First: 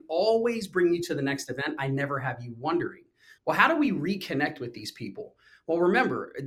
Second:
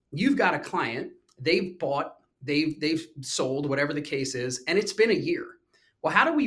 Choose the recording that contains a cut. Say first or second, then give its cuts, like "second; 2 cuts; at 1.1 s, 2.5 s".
first; 1 cut; at 3.4 s